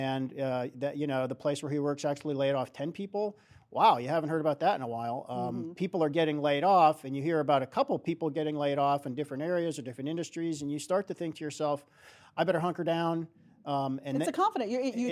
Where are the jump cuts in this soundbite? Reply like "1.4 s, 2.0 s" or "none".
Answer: none